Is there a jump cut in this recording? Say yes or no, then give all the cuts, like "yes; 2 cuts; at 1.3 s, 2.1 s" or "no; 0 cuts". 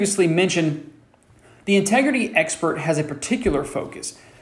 no; 0 cuts